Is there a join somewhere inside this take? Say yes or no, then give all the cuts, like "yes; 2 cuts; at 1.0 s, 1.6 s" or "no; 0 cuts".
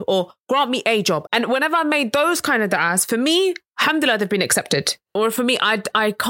yes; 2 cuts; at 1.3 s, 5.2 s